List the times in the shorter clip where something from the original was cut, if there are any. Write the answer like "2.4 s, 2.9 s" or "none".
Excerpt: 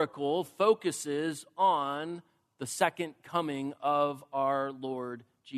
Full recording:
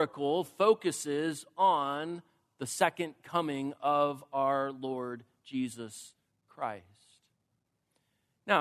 none